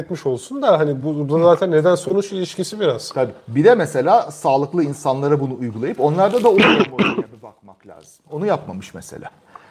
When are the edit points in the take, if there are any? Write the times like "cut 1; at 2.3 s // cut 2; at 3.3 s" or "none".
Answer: none

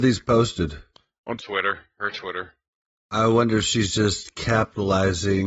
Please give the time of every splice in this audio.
cut 1; at 1.4 s

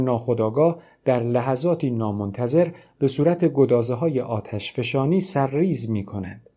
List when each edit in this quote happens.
none

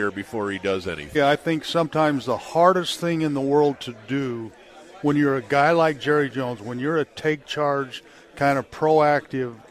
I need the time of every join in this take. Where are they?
cut 1; at 1.1 s

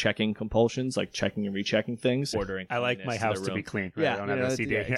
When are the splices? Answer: cut 1; at 2.3 s

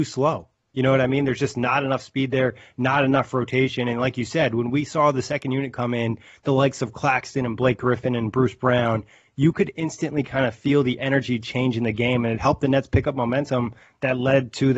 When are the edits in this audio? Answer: none

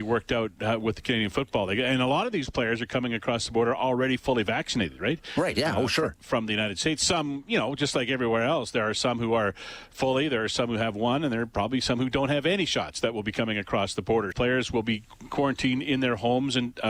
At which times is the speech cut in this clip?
cut 1; at 14.3 s

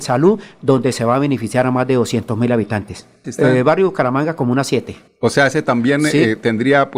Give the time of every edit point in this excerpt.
cut 1; at 3.2 s

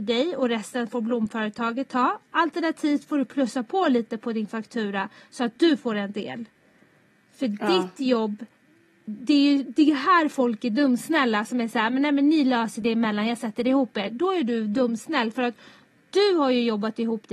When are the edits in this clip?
none

